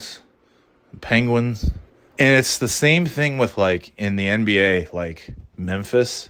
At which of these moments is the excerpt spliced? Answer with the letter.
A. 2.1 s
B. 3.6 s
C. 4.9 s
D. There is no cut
A